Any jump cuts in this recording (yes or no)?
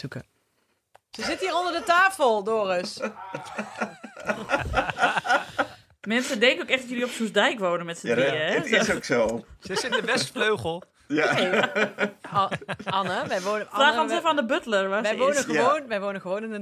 no